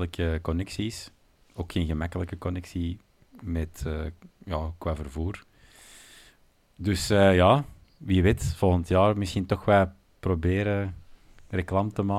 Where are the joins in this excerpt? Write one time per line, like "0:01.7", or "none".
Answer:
none